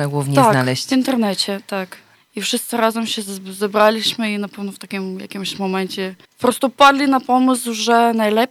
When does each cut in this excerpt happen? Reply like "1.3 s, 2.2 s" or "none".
2.1 s, 6.2 s